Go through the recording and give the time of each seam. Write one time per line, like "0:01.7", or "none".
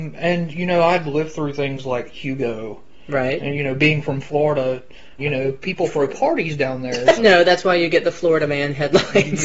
0:05.2
0:07.2

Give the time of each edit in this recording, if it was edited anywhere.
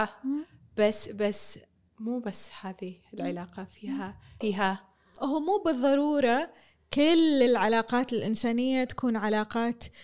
0:04.4

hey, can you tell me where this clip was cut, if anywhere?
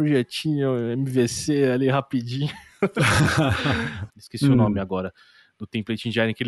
0:04.1

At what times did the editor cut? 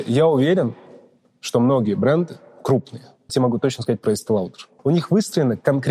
0:03.3
0:04.8

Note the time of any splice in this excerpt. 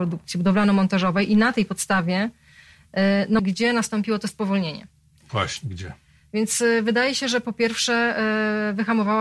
0:03.4

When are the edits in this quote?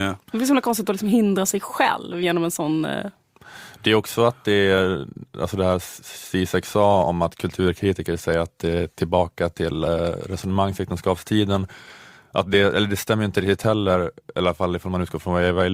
none

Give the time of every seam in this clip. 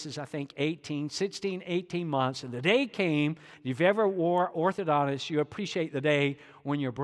none

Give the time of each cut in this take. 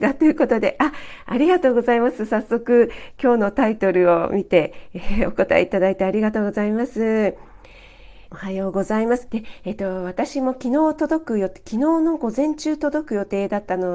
0:08.3
0:09.3

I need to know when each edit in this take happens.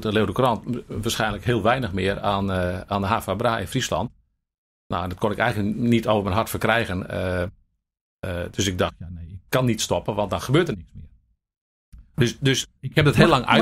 none

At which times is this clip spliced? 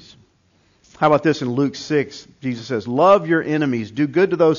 none

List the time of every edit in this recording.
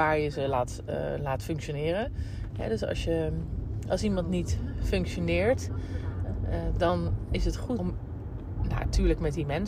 0:02.5
0:07.8

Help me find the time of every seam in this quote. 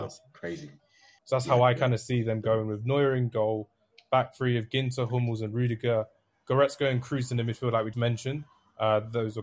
0:01.2
0:07.9

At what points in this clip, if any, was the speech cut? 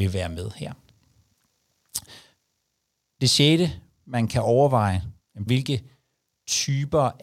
0:05.5

